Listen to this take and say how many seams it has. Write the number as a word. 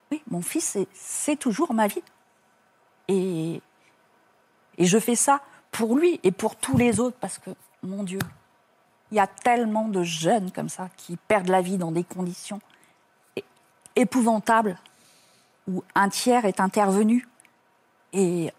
one